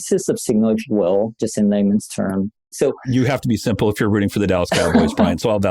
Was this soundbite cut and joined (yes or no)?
yes